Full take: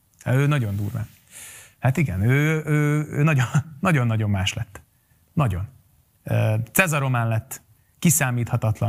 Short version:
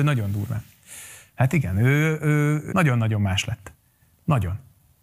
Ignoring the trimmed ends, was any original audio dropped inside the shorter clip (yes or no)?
yes